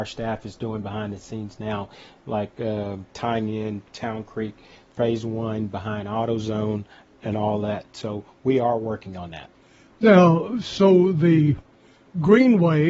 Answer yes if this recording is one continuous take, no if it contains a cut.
yes